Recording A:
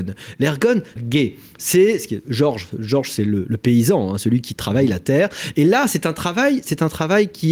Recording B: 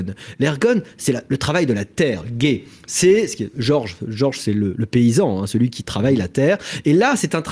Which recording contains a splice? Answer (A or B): A